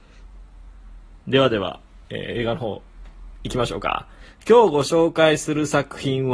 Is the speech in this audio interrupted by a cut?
yes; 1 cut; at 2.0 s

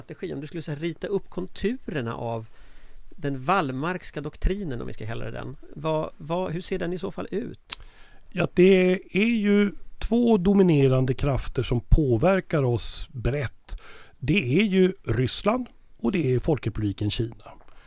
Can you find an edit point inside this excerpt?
no; 0 cuts

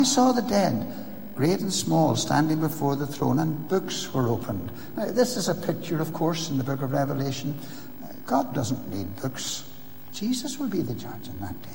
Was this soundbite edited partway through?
yes; 1 cut; at 10.1 s

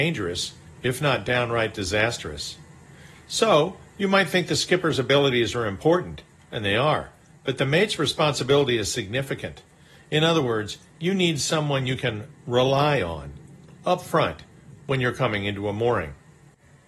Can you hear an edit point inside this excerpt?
no; 0 cuts

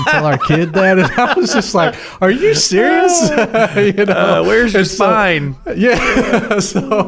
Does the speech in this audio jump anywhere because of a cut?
no; 0 cuts

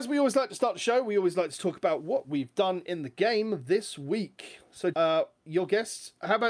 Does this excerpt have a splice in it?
yes; 1 cut; at 4.9 s

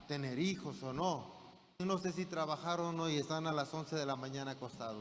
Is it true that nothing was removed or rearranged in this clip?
no; 1 cut; at 1.8 s

